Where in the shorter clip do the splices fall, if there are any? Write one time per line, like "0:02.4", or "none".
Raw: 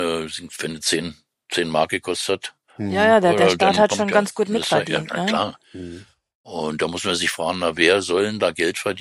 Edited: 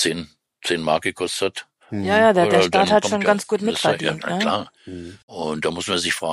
0:05.2